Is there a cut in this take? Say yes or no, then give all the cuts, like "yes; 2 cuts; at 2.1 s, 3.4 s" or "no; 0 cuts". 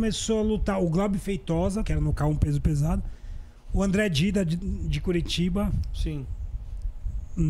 yes; 1 cut; at 1.8 s